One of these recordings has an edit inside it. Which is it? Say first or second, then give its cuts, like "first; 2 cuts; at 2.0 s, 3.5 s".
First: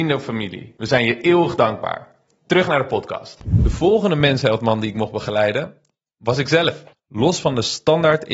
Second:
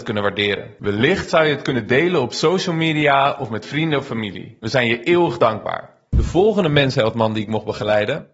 second; 1 cut; at 6.1 s